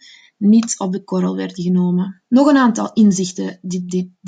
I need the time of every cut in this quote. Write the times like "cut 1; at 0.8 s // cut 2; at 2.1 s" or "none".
cut 1; at 2.3 s